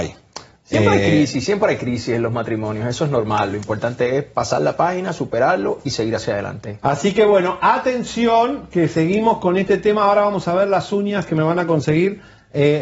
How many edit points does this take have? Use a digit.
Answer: 0